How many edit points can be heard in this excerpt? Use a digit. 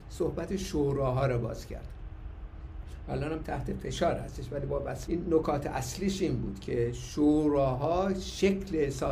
1